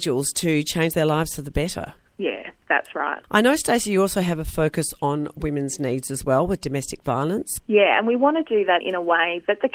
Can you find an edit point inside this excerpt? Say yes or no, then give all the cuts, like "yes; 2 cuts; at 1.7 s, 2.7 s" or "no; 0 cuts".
yes; 2 cuts; at 7.6 s, 8.8 s